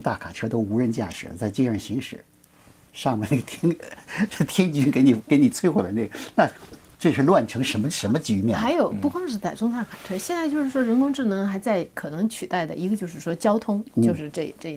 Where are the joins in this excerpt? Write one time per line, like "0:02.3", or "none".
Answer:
none